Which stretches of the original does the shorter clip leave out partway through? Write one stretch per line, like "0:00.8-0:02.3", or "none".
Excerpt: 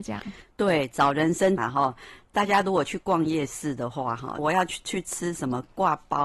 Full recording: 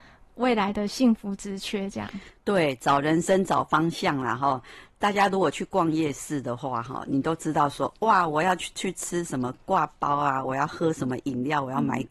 0:03.5-0:04.2
0:07.1-0:08.3